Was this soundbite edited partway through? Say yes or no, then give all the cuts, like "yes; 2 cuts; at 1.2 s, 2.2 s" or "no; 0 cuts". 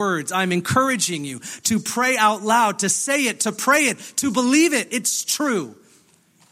no; 0 cuts